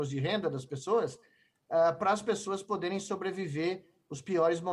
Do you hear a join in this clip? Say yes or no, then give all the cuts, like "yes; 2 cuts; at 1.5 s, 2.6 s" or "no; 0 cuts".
no; 0 cuts